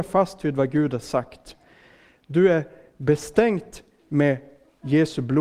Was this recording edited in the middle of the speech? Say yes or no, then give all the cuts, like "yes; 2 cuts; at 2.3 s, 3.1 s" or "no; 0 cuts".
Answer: no; 0 cuts